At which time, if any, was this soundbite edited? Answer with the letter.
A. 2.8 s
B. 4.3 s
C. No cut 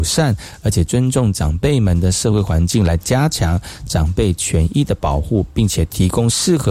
C